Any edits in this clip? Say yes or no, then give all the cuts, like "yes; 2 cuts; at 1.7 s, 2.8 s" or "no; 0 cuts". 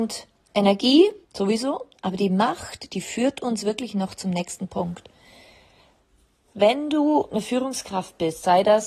yes; 1 cut; at 1.3 s